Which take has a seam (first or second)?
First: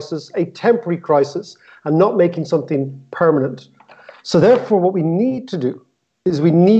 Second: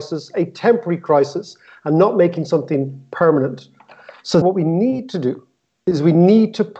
second